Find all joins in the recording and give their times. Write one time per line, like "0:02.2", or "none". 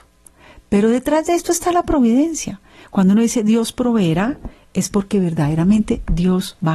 none